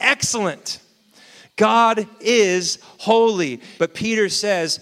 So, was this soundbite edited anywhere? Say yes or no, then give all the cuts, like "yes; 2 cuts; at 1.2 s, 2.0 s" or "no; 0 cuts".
yes; 1 cut; at 3.8 s